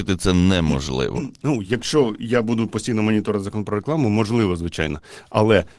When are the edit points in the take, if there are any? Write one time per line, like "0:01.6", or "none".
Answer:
none